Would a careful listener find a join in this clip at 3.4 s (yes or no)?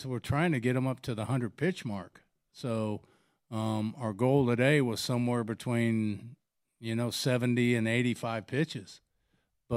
no